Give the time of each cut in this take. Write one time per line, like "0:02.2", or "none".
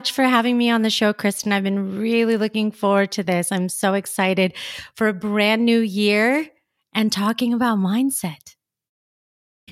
none